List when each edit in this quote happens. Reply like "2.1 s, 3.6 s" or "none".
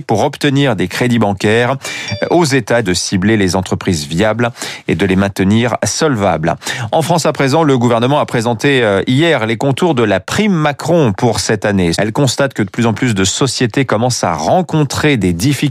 2.8 s, 11.9 s